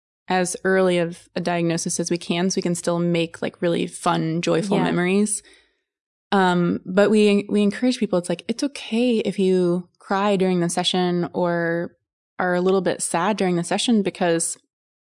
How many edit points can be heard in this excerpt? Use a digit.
0